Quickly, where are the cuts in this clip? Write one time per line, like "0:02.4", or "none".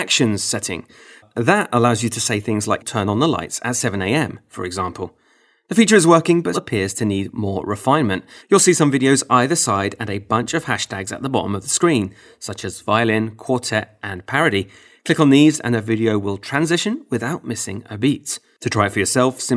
0:06.5
0:08.4